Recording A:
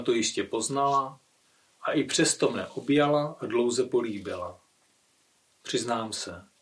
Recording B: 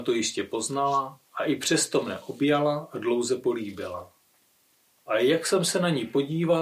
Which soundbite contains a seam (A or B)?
B